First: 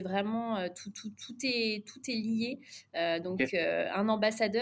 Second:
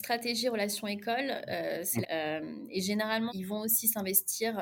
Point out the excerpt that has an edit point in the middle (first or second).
second